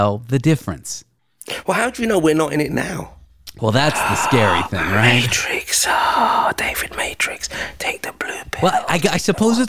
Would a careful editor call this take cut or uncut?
uncut